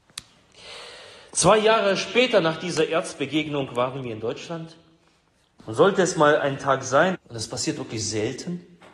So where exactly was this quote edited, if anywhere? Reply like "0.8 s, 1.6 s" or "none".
5.6 s, 7.1 s